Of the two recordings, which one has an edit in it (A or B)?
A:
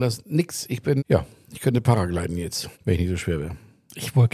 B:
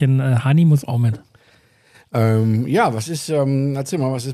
A